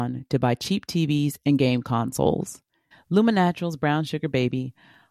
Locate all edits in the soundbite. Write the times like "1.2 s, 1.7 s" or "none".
2.9 s